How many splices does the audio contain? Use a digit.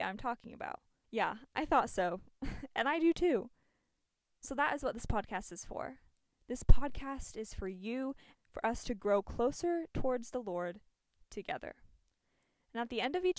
2